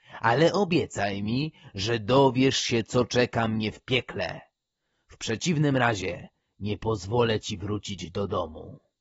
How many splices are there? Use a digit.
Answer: 0